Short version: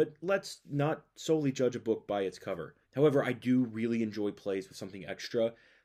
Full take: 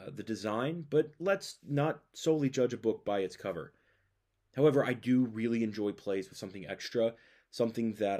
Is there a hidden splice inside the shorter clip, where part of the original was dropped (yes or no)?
yes